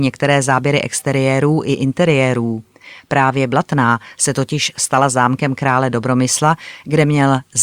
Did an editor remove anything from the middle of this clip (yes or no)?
no